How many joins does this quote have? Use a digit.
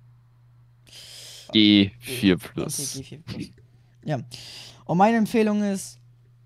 1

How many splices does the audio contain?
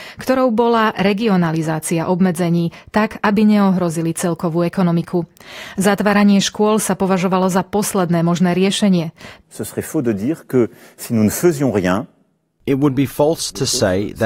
1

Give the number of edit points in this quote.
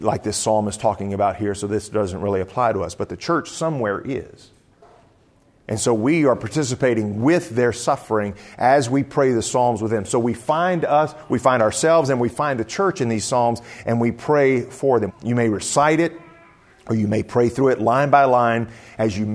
1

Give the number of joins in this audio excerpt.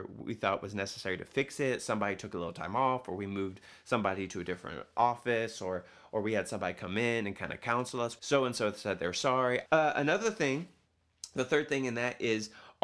2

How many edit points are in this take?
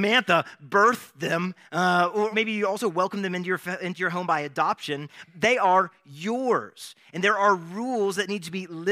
1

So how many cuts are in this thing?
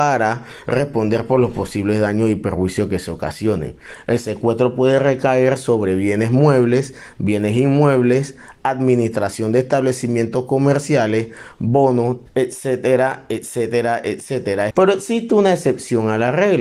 2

